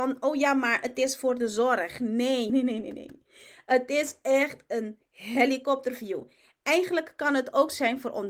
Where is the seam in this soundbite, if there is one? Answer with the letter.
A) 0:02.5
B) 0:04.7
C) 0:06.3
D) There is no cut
A